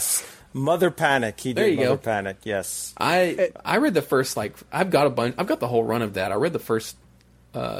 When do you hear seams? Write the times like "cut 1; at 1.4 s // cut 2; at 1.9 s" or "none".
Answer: none

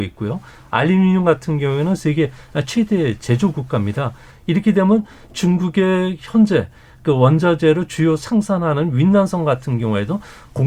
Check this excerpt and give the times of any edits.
cut 1; at 4.3 s

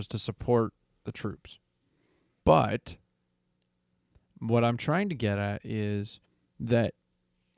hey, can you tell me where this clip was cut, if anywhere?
cut 1; at 2.4 s

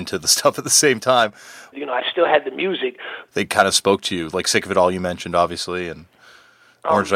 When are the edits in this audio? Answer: cut 1; at 1.7 s // cut 2; at 3.3 s

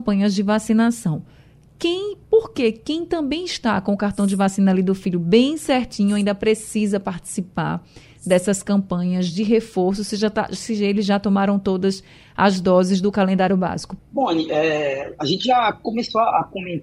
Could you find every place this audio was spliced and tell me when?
cut 1; at 14.0 s

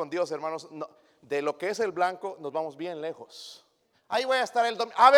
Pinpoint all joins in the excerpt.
cut 1; at 3.9 s

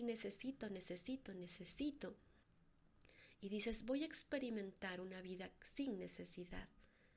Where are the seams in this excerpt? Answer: none

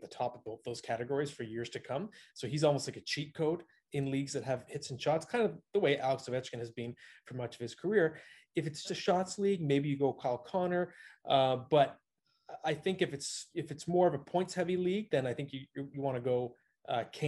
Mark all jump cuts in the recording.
cut 1; at 8.8 s

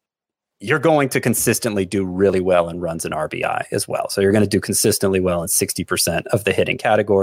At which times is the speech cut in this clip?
none

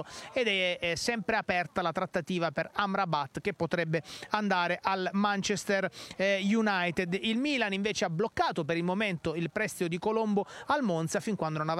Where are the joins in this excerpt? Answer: none

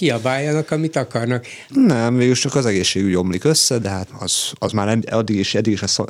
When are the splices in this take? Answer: cut 1; at 1.7 s // cut 2; at 4.1 s

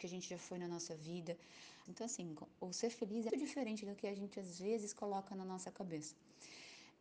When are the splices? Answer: cut 1; at 1.9 s // cut 2; at 3.3 s

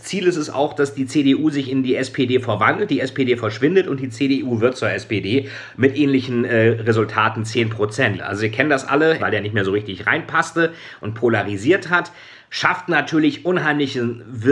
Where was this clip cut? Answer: cut 1; at 8.2 s // cut 2; at 9.2 s

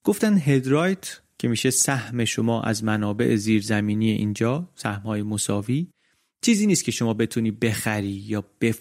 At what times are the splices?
none

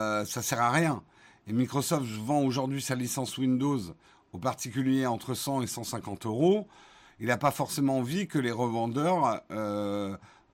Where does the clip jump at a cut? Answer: none

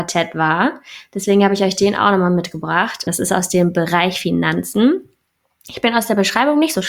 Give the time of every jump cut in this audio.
cut 1; at 3.1 s

